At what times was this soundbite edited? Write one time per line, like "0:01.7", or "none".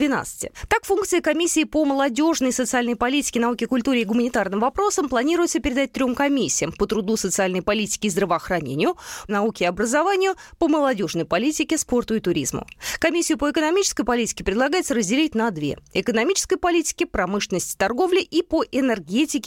0:09.3